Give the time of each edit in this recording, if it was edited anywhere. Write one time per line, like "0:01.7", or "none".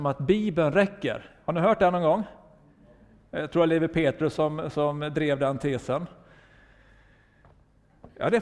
none

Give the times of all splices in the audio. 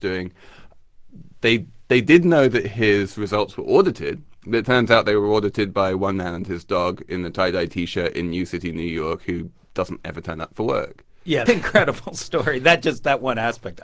0:11.5

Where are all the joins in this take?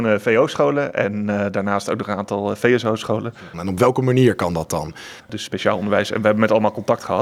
0:03.5
0:05.2

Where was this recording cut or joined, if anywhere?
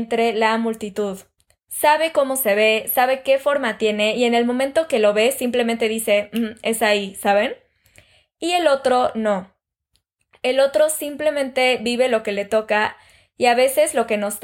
none

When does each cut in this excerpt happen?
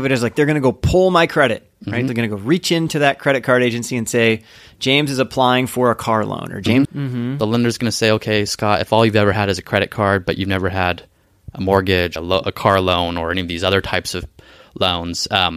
0:02.1
0:06.8
0:12.2

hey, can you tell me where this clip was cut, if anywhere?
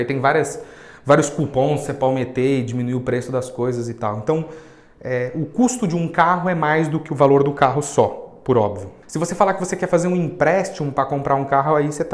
none

